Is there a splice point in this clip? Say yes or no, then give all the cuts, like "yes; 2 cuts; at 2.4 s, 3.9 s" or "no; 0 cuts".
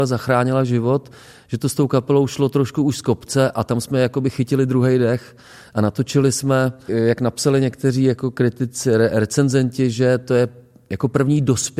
yes; 1 cut; at 6.9 s